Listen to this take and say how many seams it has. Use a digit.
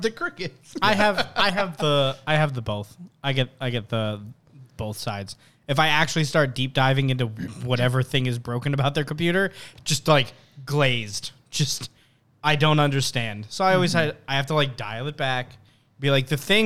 0